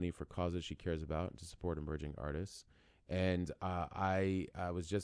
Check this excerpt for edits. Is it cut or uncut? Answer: uncut